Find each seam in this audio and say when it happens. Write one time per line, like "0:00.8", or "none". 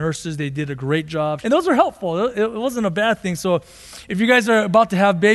0:01.4

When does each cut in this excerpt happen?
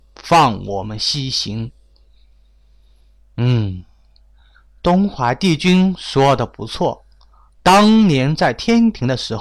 none

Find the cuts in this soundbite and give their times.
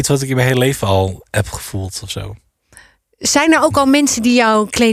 none

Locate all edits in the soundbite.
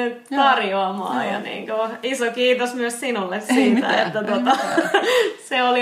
none

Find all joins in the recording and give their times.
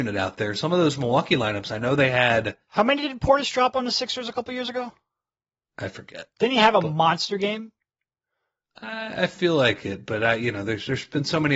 none

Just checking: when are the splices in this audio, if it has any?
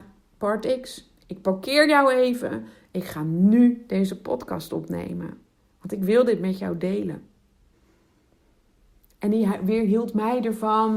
none

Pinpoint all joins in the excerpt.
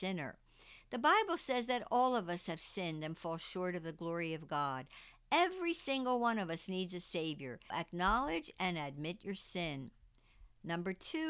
0:07.7

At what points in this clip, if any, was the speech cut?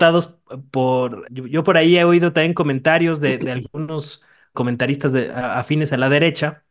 0:01.2
0:04.5

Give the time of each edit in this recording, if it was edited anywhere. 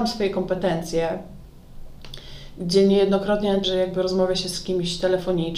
0:03.6

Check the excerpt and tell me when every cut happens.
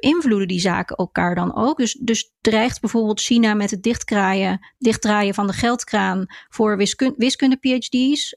none

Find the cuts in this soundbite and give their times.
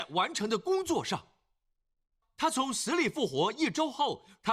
0:02.2

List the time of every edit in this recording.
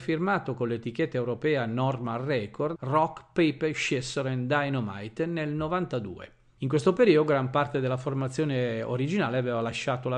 0:02.7

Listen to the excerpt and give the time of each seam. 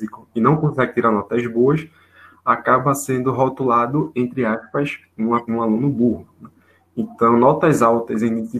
0:05.5

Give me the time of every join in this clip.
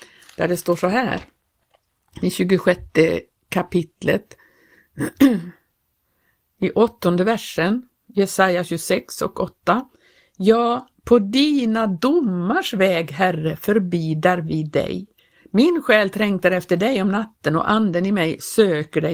0:15.4

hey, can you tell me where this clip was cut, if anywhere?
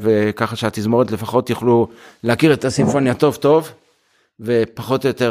none

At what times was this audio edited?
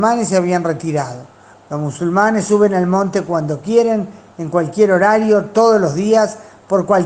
0:01.5

